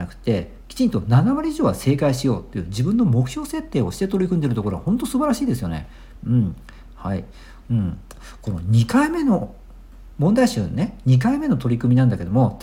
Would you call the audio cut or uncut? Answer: cut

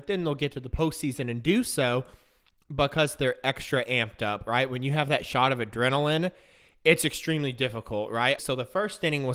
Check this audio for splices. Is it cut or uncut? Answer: cut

